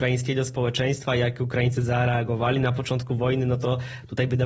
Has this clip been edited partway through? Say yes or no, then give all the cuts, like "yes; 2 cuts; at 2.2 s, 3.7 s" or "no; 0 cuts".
no; 0 cuts